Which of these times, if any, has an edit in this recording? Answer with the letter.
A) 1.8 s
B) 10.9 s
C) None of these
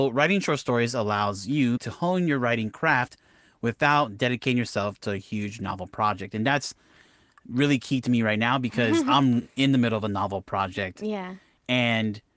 A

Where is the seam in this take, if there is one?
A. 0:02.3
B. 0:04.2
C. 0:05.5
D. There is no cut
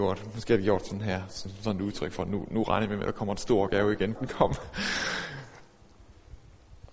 B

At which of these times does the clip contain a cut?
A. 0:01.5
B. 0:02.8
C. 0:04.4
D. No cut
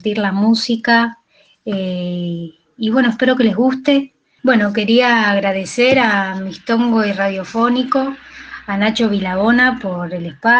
C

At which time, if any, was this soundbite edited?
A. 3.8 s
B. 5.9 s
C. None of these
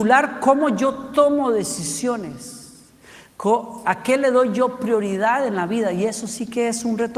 C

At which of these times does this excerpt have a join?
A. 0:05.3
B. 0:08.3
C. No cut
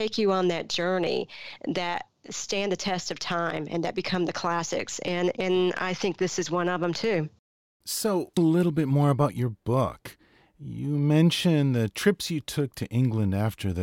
B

